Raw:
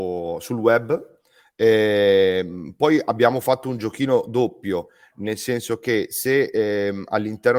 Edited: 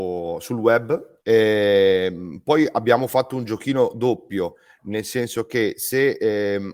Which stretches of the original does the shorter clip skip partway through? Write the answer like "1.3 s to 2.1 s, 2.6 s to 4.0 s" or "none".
1.2 s to 1.5 s